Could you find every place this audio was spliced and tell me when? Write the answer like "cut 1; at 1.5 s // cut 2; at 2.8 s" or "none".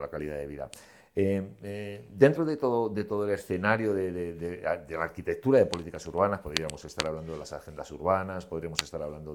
none